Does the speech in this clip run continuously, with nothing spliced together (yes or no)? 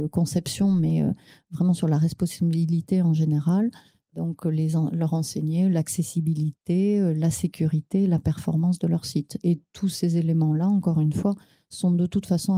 yes